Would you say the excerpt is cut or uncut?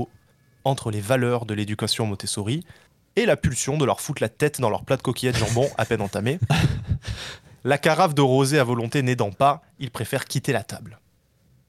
uncut